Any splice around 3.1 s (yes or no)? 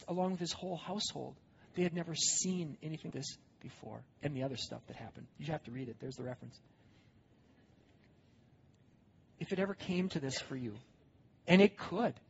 yes